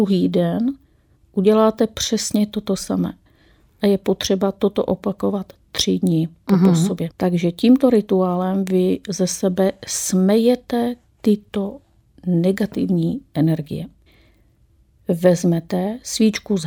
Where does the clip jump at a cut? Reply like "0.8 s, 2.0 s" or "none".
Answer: 7.1 s